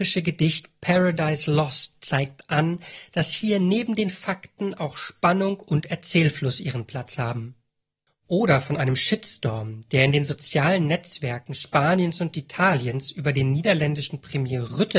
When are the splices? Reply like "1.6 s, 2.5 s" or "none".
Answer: 8.1 s